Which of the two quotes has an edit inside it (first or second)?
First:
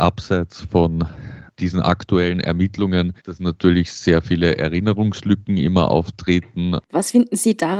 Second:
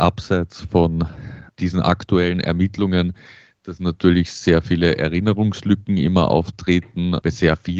first